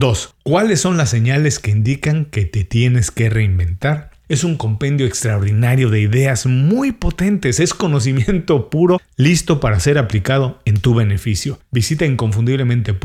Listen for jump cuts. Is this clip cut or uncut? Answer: cut